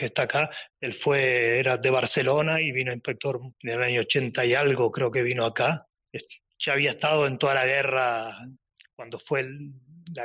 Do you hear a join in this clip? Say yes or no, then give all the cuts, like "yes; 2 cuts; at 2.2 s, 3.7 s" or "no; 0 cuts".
yes; 1 cut; at 3.5 s